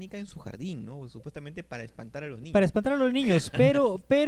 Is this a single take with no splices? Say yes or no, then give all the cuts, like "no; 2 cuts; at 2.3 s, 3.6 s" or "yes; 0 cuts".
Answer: yes; 0 cuts